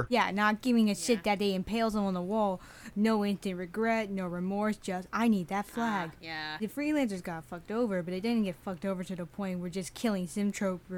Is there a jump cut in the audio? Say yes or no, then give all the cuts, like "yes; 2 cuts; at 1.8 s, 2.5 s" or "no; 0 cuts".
no; 0 cuts